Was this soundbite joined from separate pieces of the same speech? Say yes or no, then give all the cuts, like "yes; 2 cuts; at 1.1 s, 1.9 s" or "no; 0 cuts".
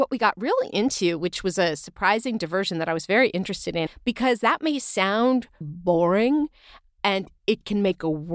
yes; 2 cuts; at 3.9 s, 5.6 s